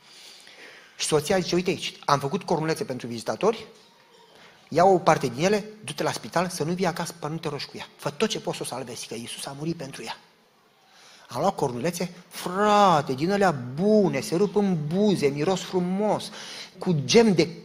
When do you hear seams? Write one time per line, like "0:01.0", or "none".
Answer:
0:16.7